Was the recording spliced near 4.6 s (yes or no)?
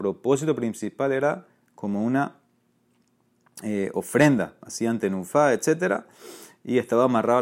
no